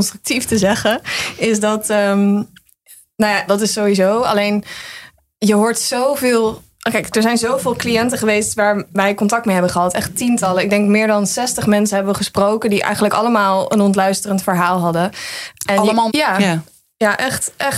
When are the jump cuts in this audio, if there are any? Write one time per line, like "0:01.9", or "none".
0:03.5
0:16.1